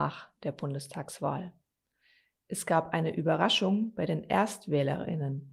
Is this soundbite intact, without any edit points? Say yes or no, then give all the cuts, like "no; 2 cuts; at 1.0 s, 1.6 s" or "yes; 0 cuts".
yes; 0 cuts